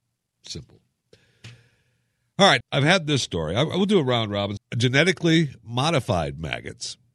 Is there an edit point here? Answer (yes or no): yes